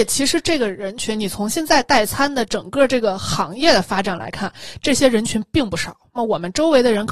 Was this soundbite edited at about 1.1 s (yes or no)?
no